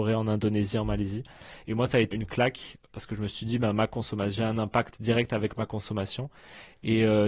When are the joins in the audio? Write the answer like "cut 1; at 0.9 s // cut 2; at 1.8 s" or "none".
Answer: cut 1; at 2.1 s